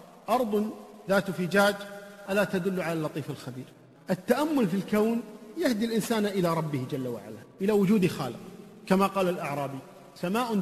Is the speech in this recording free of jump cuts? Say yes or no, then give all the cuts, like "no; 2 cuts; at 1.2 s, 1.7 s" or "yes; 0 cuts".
no; 2 cuts; at 2.3 s, 4.0 s